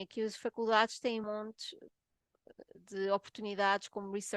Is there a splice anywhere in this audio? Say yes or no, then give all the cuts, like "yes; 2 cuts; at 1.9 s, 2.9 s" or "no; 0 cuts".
yes; 1 cut; at 1.2 s